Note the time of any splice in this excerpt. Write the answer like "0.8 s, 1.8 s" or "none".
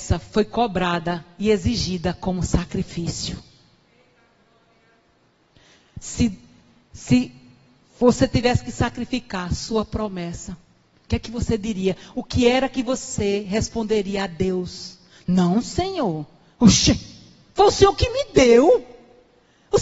none

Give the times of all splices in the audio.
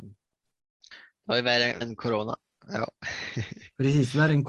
1.8 s

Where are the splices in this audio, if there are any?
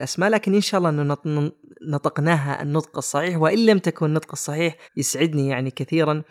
4.8 s

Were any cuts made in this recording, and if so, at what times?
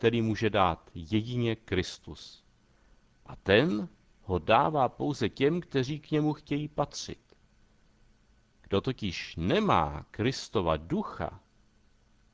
none

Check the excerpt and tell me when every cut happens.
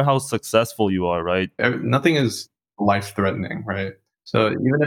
1.6 s

